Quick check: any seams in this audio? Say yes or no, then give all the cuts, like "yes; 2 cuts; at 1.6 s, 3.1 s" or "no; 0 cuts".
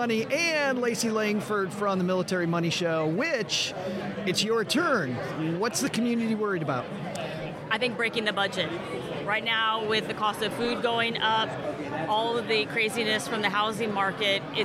no; 0 cuts